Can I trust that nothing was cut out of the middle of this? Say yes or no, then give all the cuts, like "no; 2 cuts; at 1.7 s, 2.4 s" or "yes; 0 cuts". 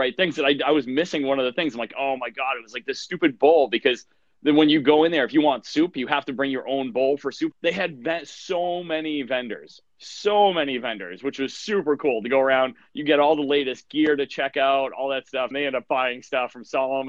no; 2 cuts; at 7.5 s, 15.5 s